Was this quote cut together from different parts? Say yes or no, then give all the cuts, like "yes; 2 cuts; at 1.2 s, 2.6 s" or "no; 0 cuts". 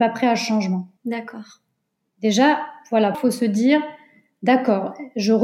yes; 2 cuts; at 1.0 s, 3.1 s